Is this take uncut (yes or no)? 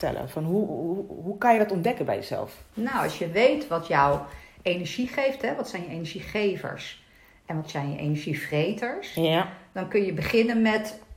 yes